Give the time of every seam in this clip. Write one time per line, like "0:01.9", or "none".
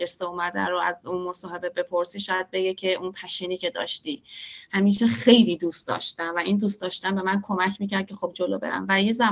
0:08.3